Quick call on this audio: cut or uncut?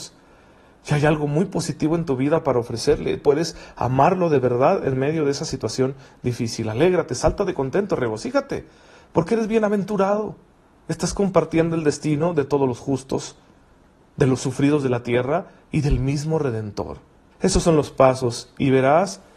cut